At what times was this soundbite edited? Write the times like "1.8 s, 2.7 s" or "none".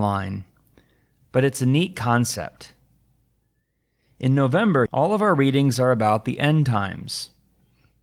4.9 s